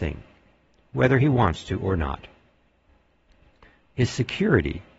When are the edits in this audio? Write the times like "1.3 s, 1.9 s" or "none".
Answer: none